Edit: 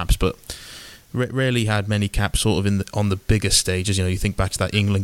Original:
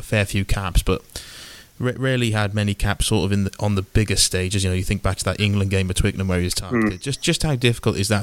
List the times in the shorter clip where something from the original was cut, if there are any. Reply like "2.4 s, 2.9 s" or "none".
none